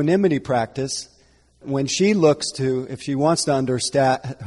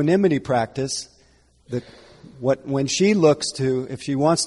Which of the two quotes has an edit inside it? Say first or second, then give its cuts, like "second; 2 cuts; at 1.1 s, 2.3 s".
first; 1 cut; at 1.6 s